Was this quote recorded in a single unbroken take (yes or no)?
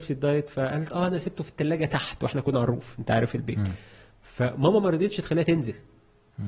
yes